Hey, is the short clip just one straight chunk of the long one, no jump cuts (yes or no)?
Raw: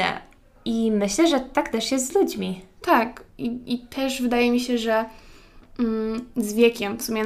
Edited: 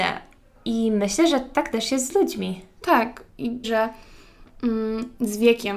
no